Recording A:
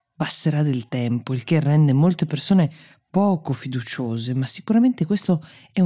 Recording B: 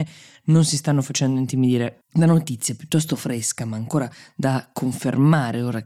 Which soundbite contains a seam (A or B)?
B